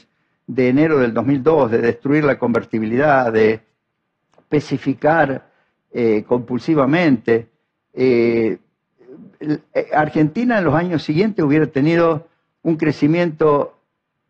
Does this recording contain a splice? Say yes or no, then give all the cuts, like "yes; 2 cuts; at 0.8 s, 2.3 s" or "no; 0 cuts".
no; 0 cuts